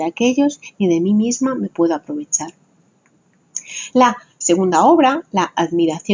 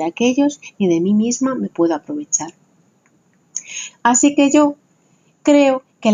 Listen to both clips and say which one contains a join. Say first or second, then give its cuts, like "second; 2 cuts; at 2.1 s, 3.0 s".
second; 1 cut; at 3.9 s